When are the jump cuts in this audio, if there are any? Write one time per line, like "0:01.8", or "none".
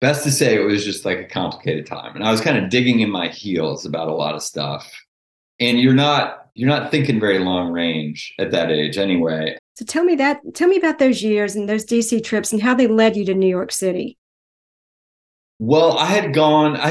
0:09.6

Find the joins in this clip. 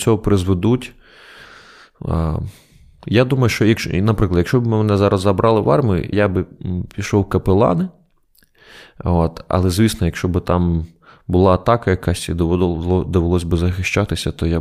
0:06.1

